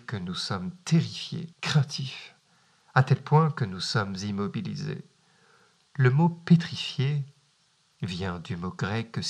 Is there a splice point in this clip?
yes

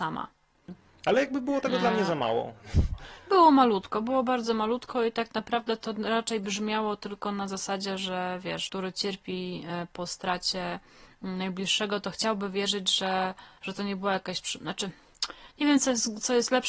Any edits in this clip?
yes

